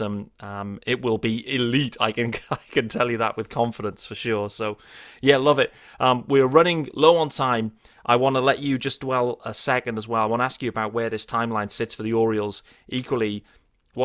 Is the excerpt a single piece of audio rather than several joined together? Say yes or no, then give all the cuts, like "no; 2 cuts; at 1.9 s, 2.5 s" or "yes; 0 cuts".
yes; 0 cuts